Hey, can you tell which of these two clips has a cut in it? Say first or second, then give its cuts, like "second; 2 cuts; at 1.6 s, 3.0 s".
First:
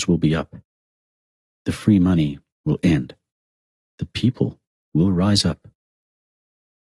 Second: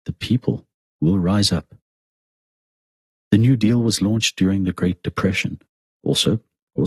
second; 1 cut; at 3.1 s